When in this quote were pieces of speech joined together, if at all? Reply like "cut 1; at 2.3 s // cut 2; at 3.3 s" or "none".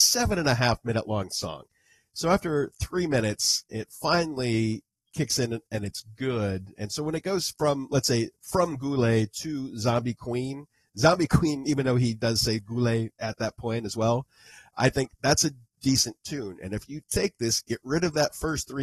none